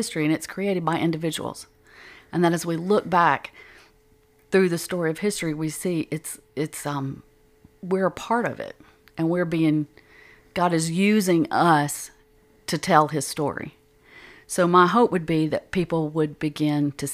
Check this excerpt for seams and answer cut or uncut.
uncut